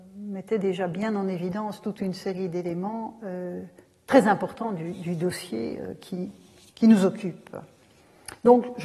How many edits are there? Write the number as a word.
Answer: zero